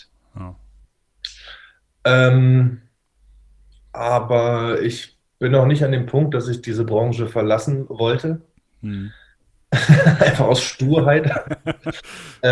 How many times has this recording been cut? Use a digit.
0